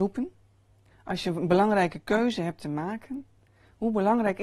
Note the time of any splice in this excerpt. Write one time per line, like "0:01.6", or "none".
0:00.9